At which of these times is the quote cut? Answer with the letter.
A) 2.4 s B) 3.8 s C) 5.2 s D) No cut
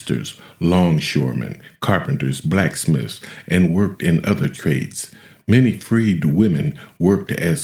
D